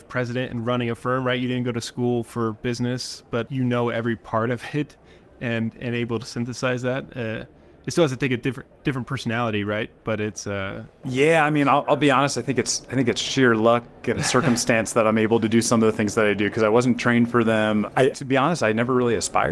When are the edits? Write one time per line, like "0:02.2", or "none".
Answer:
0:18.1